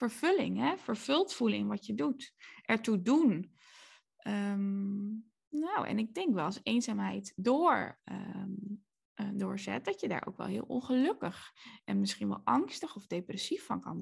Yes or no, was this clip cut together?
no